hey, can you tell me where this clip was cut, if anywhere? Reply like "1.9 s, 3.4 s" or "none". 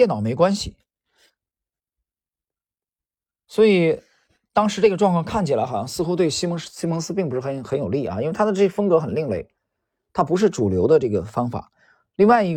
none